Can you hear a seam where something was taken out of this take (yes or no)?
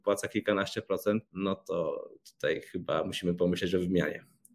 yes